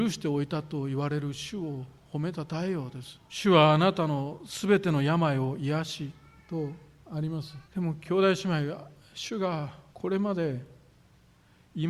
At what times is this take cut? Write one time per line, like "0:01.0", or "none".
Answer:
0:03.2
0:07.6
0:09.9